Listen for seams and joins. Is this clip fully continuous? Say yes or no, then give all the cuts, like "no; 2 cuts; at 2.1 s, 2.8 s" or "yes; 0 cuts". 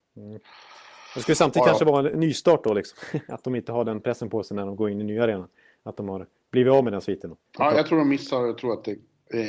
no; 1 cut; at 7.4 s